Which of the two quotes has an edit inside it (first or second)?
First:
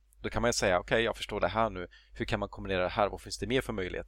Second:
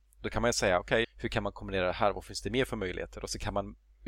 second